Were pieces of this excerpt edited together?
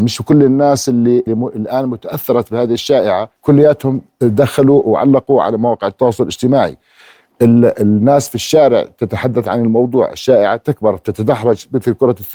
yes; 2 cuts; at 1.3 s, 3.4 s

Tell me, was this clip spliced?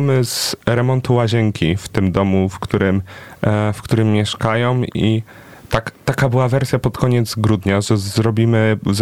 no; 0 cuts

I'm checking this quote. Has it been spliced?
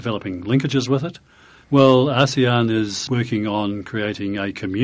yes; 2 cuts; at 1.6 s, 3.1 s

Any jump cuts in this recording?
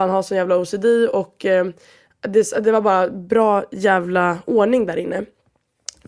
no; 0 cuts

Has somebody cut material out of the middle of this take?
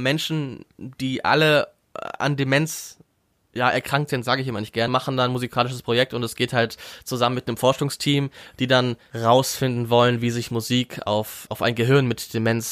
yes; 2 cuts; at 4.9 s, 11.5 s

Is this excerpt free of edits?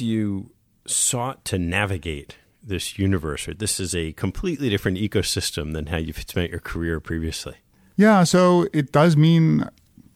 yes; 0 cuts

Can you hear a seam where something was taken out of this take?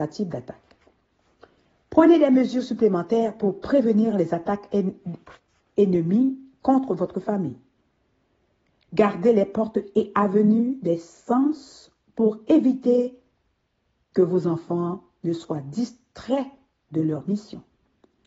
no; 0 cuts

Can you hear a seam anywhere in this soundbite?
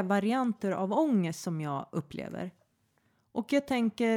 no; 0 cuts

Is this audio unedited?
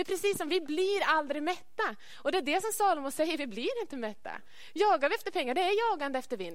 yes; 0 cuts

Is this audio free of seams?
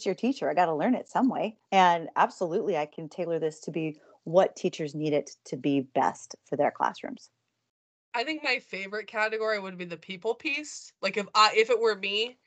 no; 1 cut; at 1.7 s

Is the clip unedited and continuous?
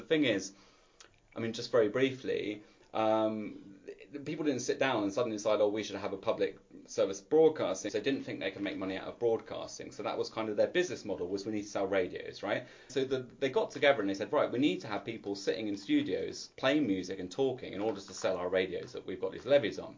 no; 2 cuts; at 7.9 s, 12.9 s

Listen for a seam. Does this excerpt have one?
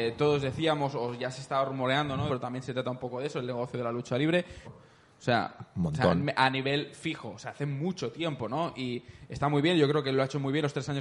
yes; 2 cuts; at 2.3 s, 4.6 s

